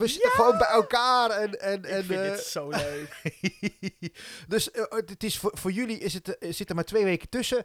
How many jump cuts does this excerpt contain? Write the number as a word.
zero